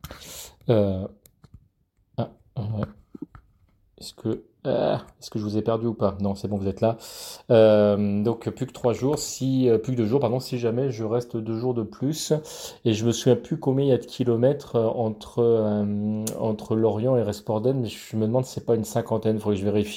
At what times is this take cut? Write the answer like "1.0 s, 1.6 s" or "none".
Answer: none